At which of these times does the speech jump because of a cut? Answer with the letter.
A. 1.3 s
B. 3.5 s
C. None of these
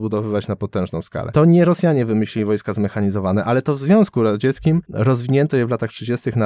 C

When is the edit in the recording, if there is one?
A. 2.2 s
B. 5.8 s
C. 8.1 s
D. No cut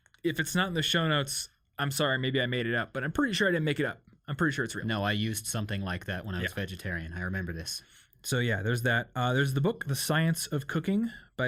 D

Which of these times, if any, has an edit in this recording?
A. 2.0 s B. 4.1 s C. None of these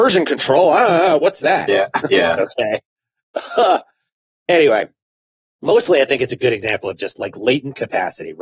A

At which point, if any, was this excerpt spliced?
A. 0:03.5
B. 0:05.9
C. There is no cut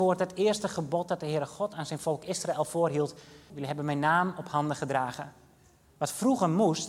A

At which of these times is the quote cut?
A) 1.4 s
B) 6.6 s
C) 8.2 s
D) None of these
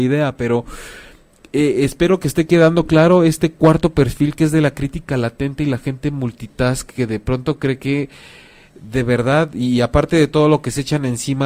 D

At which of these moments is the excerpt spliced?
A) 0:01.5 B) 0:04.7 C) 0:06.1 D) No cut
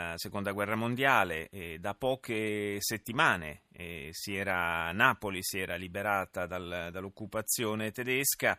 D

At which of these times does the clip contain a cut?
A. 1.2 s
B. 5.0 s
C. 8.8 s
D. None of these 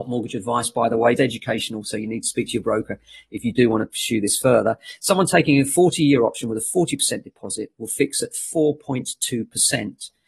A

